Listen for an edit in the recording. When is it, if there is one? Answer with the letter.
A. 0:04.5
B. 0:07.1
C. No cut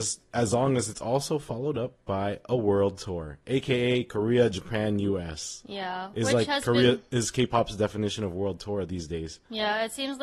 C